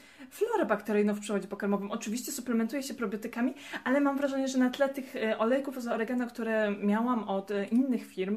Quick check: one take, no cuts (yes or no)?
yes